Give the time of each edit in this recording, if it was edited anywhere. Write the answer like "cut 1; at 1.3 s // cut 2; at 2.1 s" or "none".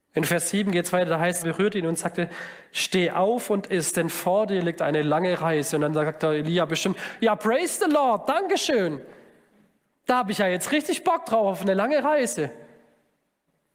cut 1; at 1.4 s